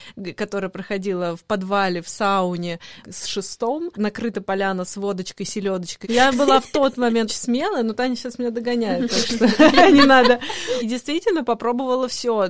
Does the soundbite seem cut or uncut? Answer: cut